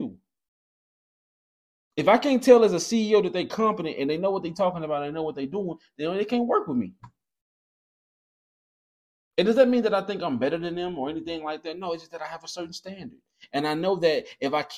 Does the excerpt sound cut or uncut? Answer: uncut